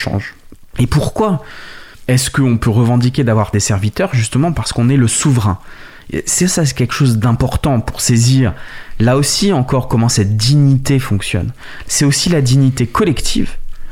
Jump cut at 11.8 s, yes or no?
yes